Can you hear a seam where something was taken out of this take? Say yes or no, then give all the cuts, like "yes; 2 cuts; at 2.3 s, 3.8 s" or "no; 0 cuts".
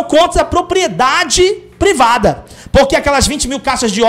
no; 0 cuts